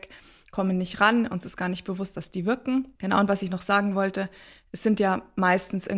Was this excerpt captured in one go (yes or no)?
yes